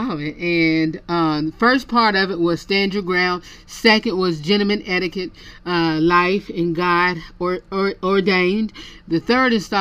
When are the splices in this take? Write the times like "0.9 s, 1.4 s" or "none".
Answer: none